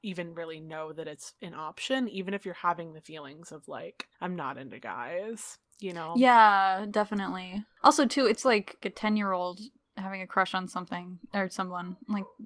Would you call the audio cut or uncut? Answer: cut